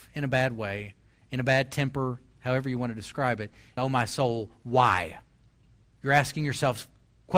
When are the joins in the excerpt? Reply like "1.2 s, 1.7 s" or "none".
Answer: 3.8 s